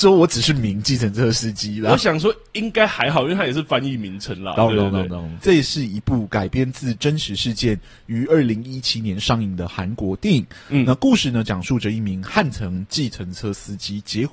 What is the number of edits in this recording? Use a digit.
1